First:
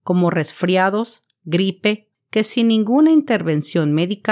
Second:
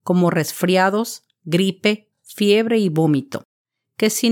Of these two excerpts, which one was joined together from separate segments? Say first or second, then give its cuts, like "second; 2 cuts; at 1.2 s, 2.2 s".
first; 1 cut; at 2.1 s